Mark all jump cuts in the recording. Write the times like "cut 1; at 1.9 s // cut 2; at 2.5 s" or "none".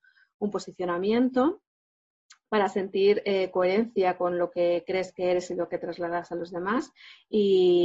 none